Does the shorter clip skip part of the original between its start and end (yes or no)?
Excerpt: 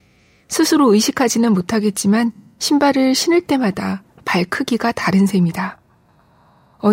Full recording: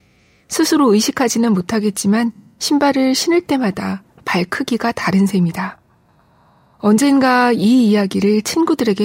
no